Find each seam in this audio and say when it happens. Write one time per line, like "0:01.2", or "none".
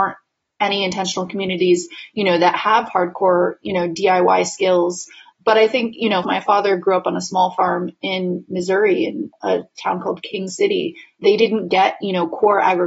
0:06.2
0:11.2